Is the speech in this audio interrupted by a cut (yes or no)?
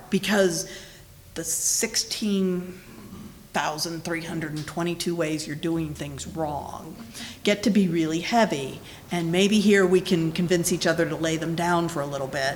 no